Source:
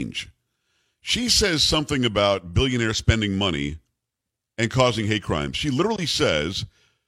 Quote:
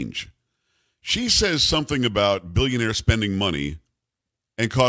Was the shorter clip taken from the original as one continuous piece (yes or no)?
yes